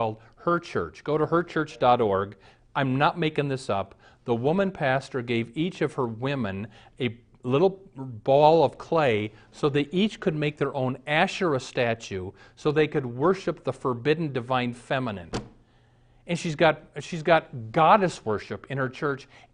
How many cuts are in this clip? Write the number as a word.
zero